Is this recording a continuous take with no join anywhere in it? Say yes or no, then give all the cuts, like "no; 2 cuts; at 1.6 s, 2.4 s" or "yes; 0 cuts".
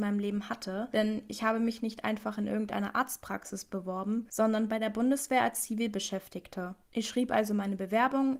yes; 0 cuts